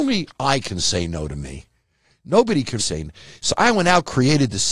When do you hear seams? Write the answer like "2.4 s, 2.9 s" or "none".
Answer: 2.8 s